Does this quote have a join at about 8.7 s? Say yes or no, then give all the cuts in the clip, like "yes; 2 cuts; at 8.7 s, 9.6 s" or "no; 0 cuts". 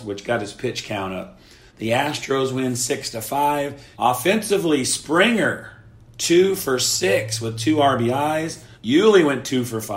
yes; 3 cuts; at 1.7 s, 3.9 s, 8.7 s